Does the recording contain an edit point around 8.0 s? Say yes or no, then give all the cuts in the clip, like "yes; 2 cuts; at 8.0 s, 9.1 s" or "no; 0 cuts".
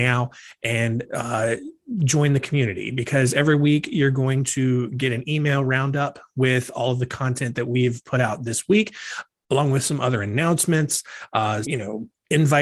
no; 1 cut; at 11.6 s